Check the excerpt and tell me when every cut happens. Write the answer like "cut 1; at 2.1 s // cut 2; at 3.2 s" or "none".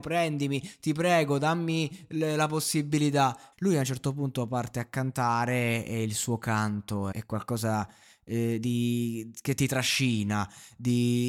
cut 1; at 3.5 s // cut 2; at 7.1 s